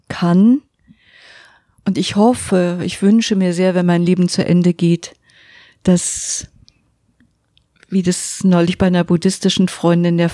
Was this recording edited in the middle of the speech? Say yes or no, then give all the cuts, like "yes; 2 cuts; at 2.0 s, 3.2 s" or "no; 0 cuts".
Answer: no; 0 cuts